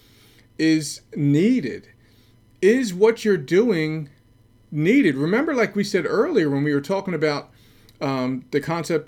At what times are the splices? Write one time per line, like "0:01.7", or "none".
none